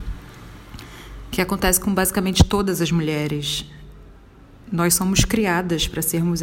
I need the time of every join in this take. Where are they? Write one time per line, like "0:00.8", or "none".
none